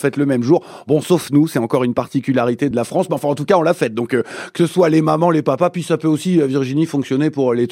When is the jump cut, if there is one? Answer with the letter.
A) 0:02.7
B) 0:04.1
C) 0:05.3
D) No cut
A